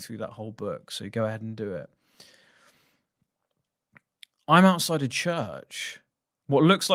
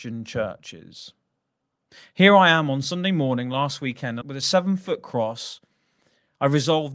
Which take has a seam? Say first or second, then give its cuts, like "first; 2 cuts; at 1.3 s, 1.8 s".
second; 1 cut; at 4.2 s